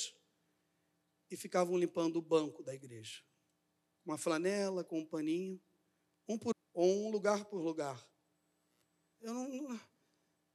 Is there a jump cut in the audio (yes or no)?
yes